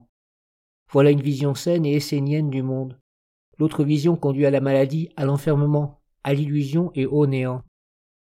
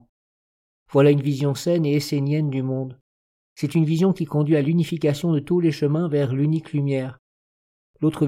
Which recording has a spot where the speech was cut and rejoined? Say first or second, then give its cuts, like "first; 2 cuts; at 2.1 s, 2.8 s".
first; 1 cut; at 3.4 s